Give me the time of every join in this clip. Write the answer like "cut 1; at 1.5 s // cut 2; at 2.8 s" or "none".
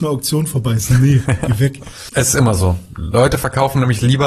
cut 1; at 2.1 s